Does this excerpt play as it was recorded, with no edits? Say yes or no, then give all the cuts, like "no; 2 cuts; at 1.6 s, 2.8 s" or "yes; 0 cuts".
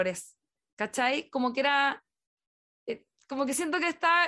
yes; 0 cuts